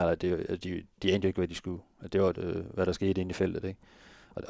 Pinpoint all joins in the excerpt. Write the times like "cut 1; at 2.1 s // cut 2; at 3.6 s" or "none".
cut 1; at 2.3 s

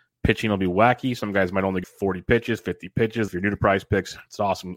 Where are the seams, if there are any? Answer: cut 1; at 1.8 s // cut 2; at 3.3 s

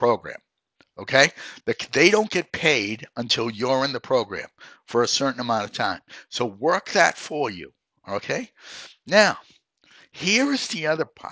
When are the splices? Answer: none

